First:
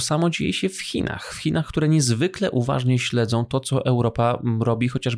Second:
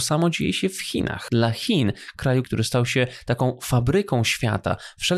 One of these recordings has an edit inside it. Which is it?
second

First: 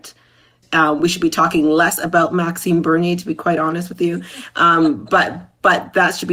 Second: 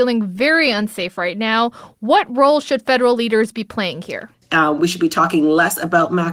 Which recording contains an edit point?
second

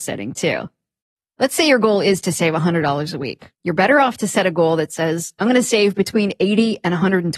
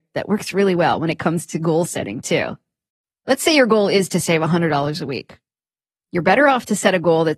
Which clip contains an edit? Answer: first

